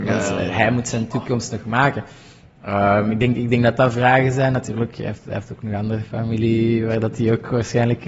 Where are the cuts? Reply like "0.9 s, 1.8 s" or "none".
none

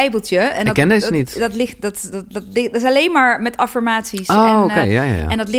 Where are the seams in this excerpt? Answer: none

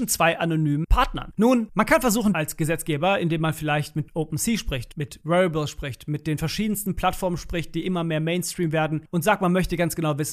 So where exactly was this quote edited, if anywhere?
2.3 s

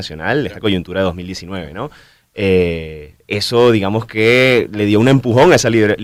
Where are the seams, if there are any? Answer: none

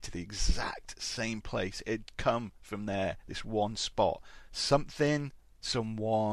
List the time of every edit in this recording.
none

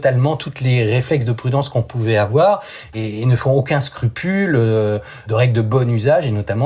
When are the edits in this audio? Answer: 2.9 s

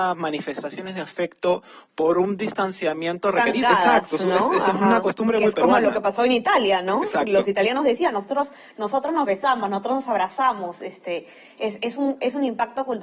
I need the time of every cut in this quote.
3.6 s

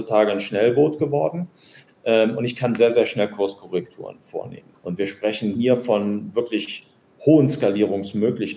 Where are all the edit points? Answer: 4.7 s

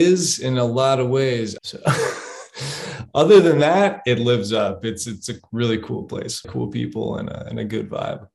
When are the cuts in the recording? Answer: 1.6 s, 6.4 s

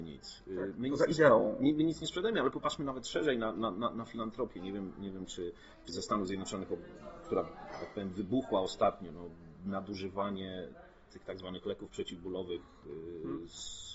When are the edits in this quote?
5.9 s

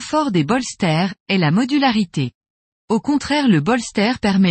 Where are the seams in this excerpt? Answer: 1.2 s, 2.7 s

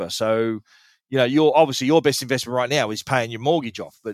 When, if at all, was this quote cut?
none

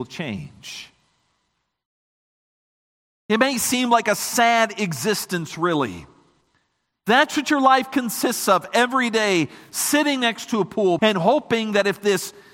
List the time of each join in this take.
3.1 s, 11.0 s

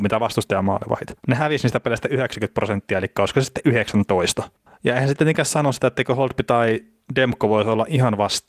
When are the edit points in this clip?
4.7 s

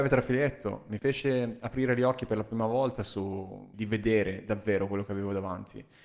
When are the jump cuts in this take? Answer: 1.0 s, 3.7 s

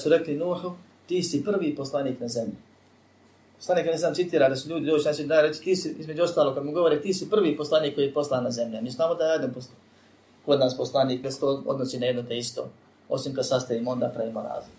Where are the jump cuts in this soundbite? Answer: 11.2 s

